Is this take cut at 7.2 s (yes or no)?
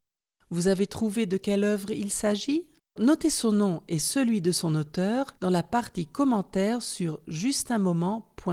no